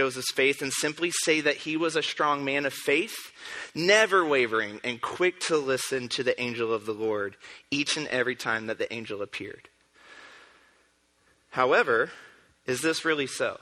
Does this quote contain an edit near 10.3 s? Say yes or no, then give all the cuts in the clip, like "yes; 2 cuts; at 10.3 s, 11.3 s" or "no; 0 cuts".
no; 0 cuts